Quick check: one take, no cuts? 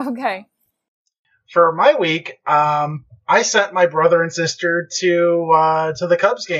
yes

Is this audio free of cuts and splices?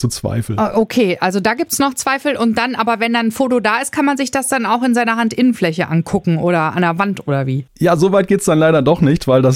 yes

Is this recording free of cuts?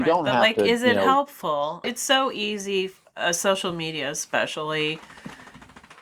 no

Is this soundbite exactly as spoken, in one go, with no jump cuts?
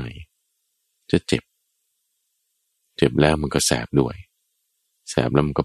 yes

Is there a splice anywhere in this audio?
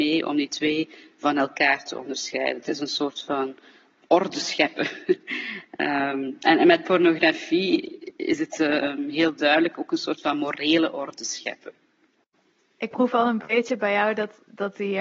no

